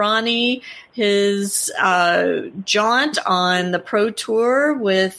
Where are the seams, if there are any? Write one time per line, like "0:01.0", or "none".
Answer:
none